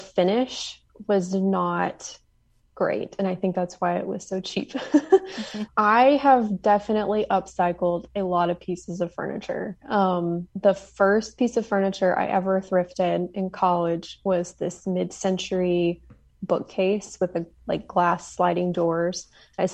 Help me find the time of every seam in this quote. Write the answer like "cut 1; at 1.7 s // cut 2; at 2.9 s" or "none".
cut 1; at 5.7 s // cut 2; at 10.5 s